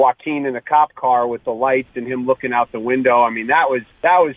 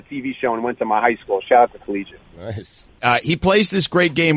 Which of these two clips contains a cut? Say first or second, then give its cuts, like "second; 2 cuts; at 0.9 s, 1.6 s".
second; 1 cut; at 3.0 s